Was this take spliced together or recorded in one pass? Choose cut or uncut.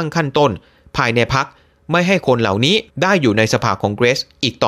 cut